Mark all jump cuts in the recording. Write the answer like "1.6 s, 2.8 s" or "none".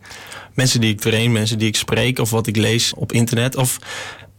2.9 s